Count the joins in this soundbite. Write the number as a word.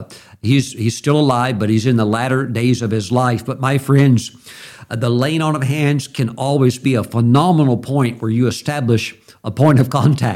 zero